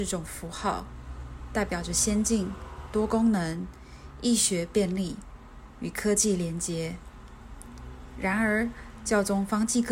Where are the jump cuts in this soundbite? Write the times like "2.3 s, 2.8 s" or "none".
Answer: none